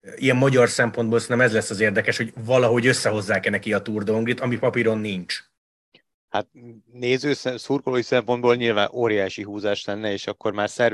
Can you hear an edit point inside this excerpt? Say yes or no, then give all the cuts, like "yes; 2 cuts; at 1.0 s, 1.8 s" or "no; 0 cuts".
no; 0 cuts